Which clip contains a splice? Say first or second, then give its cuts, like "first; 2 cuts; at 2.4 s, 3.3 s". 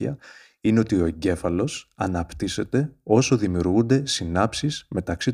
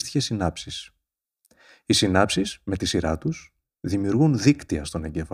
second; 1 cut; at 3.6 s